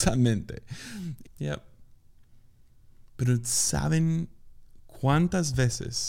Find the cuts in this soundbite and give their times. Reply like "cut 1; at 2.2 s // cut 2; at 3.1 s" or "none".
cut 1; at 1.2 s